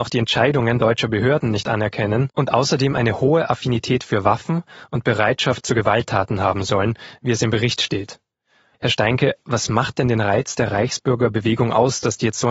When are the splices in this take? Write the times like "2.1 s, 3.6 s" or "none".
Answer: 8.7 s